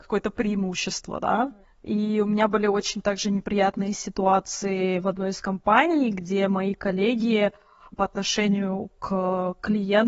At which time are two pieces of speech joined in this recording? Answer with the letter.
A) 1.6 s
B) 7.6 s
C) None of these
A